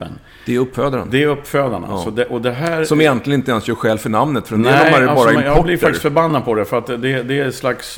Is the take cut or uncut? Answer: uncut